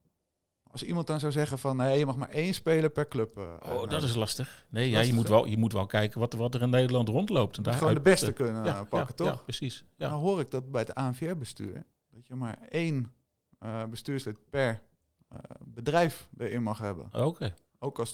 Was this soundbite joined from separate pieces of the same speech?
no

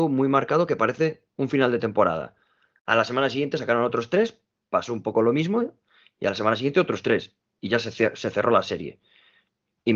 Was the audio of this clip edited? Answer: no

